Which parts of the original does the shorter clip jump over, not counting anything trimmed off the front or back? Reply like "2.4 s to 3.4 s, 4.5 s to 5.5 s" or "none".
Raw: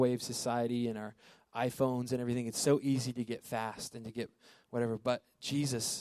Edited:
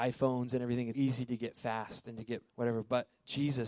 2.5 s to 2.8 s, 4.4 s to 4.6 s